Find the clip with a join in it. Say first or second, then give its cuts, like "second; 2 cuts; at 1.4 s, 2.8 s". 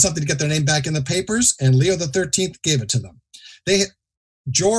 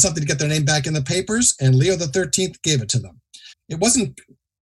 second; 1 cut; at 3.5 s